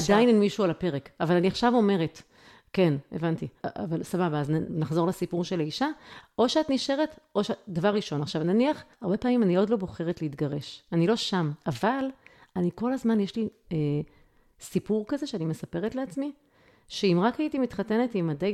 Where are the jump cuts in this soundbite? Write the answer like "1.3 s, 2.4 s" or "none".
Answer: 3.6 s, 6.2 s, 8.9 s